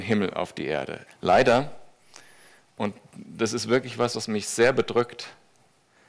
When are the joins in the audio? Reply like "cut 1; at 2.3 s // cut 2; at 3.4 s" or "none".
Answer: cut 1; at 1.1 s